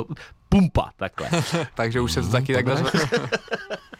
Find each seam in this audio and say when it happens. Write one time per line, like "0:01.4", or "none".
0:01.7
0:02.9